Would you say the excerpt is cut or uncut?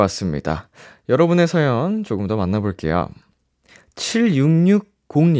uncut